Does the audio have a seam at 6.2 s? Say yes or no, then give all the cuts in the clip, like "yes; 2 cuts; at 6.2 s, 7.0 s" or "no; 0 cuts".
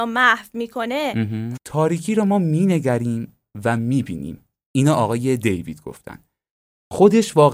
no; 1 cut; at 1.6 s